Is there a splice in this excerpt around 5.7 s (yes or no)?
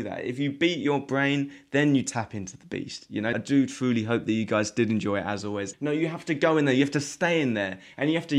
yes